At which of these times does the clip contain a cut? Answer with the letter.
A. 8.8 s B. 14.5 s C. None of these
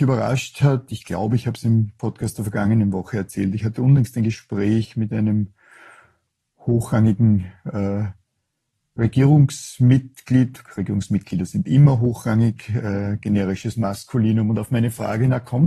C